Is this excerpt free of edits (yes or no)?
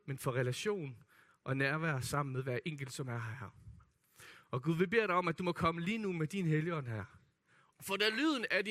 no